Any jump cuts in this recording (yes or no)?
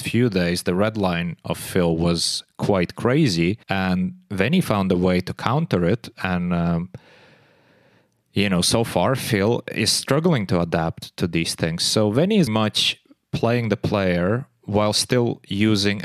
yes